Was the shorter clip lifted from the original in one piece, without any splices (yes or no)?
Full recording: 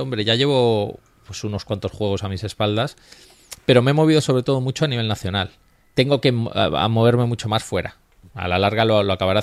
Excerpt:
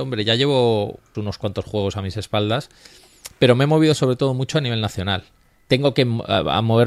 no